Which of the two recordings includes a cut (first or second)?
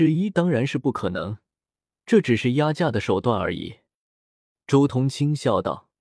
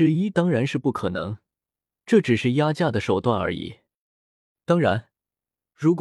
first